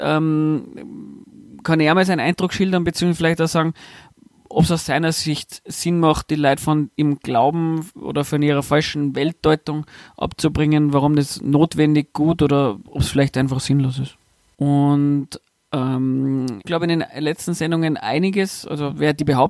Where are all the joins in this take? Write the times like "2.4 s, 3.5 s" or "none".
14.5 s, 16.6 s